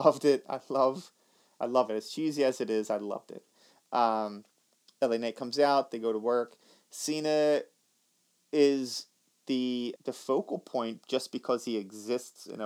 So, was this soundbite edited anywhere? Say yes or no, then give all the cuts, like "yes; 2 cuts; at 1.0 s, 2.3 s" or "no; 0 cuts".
yes; 1 cut; at 10.0 s